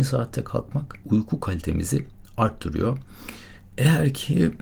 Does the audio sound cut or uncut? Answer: cut